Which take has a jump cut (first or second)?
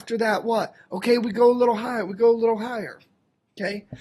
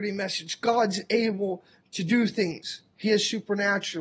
second